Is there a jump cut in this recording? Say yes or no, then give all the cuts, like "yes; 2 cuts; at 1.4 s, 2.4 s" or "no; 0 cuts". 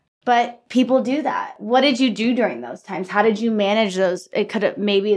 no; 0 cuts